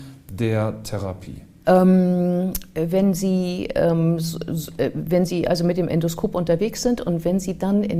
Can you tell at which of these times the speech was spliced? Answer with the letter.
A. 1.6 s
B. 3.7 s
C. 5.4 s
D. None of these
A